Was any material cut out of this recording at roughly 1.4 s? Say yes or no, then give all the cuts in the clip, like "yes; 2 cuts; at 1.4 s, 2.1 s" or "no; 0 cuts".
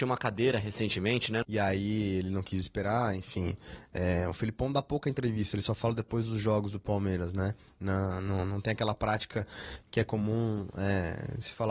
yes; 1 cut; at 1.4 s